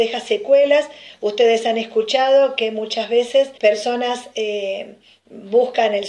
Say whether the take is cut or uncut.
cut